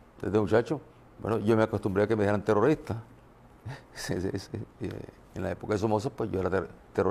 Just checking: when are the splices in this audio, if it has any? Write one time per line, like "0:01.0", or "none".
none